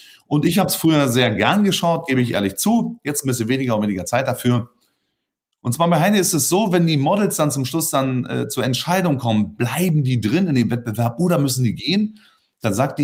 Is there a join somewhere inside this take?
no; 0 cuts

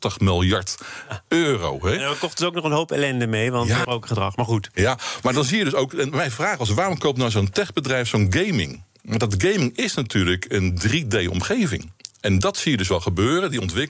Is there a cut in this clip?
yes; 1 cut; at 3.8 s

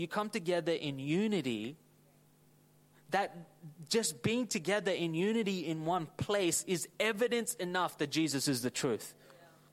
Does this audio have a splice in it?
no; 0 cuts

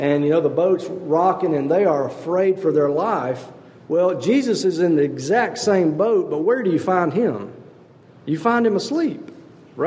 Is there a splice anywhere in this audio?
no; 0 cuts

